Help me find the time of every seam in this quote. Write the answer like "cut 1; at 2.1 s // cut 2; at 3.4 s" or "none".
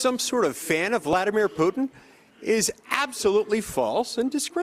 none